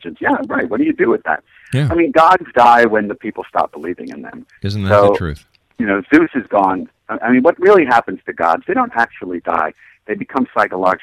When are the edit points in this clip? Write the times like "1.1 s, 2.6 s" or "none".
none

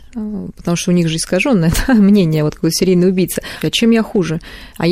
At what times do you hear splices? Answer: 3.6 s

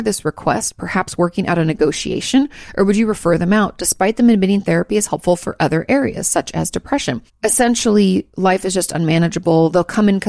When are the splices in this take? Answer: 7.3 s

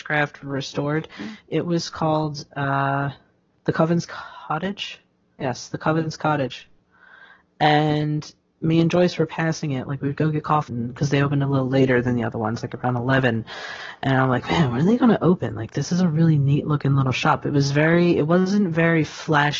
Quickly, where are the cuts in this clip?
10.7 s

